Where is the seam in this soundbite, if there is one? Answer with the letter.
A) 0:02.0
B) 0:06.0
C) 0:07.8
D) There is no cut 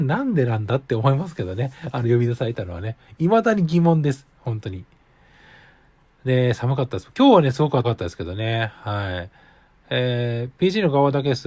C